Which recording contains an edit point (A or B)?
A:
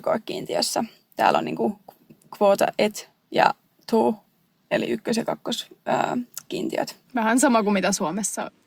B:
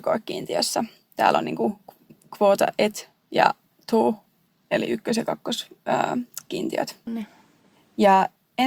B